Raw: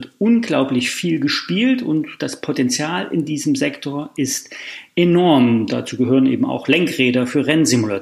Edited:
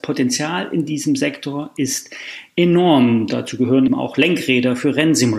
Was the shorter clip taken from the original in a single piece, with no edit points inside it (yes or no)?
no